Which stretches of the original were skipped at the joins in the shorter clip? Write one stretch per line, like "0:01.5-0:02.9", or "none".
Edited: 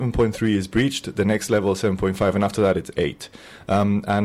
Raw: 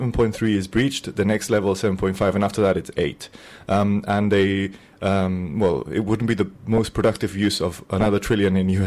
none